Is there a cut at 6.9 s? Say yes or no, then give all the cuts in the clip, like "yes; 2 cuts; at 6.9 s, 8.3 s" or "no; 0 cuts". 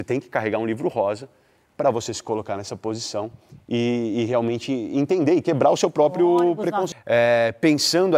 yes; 1 cut; at 6.9 s